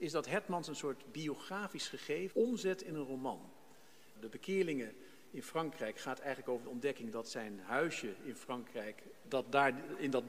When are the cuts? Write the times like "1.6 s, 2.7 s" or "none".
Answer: 2.3 s, 4.2 s, 9.2 s